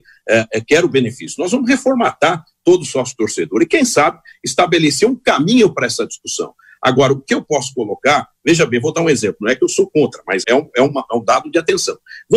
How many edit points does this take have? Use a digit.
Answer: 1